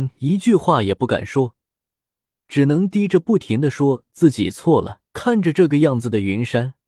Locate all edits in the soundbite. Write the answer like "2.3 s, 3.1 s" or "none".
5.1 s